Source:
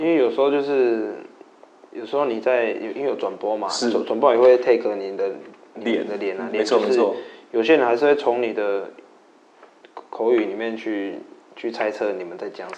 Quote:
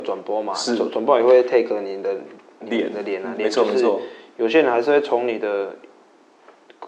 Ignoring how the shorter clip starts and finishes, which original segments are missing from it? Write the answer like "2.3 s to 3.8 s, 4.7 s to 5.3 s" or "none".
none